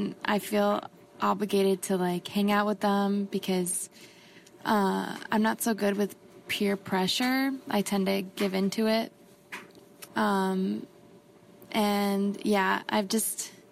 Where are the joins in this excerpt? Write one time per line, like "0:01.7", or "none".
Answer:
0:10.1